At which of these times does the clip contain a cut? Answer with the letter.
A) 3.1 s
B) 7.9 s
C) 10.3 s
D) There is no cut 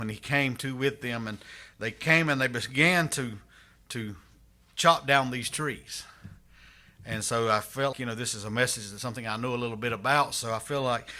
B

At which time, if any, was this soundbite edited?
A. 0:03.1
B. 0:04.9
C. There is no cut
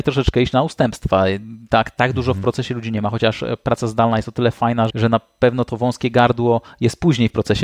B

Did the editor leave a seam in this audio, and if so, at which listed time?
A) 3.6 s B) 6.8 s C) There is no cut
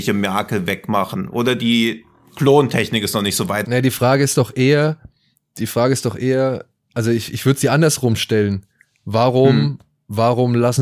A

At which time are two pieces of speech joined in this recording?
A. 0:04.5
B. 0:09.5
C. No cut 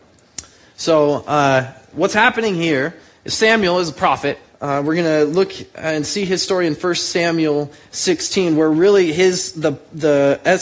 A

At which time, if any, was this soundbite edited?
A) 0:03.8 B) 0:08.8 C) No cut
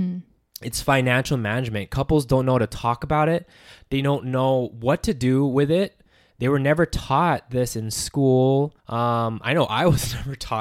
B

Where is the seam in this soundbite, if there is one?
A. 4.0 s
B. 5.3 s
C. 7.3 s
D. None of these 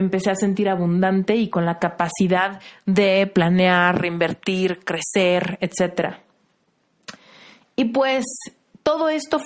D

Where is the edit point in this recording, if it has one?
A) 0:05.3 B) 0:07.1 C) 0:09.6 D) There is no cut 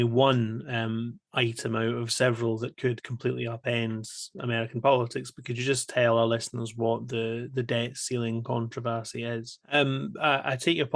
C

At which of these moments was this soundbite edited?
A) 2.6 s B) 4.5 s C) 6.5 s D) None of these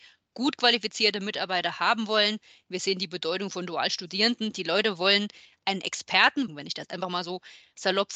C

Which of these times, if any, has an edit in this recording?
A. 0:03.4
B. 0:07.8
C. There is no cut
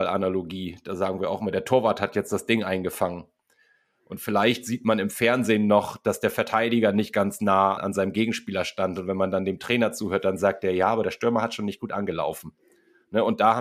B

